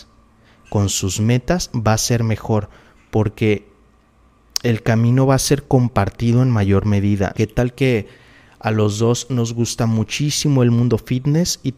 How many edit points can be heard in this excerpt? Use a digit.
1